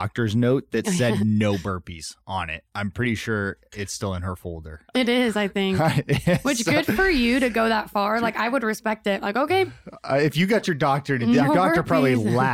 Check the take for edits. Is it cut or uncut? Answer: cut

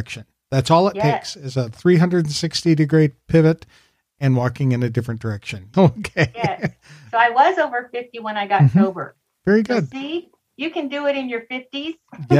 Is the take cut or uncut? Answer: cut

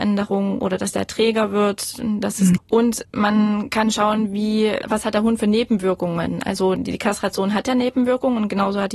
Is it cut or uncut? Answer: cut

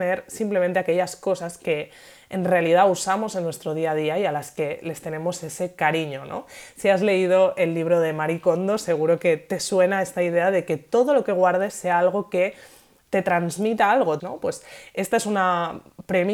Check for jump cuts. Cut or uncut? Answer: cut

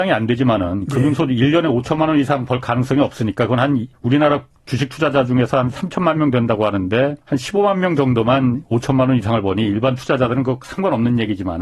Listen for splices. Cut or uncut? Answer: cut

